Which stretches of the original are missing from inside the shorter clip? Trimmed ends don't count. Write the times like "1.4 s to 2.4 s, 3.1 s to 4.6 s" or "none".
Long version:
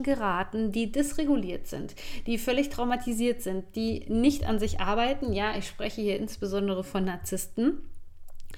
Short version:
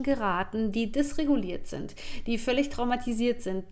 none